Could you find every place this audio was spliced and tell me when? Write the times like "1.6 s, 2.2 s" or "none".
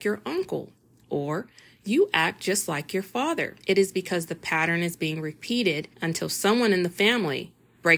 3.6 s, 5.9 s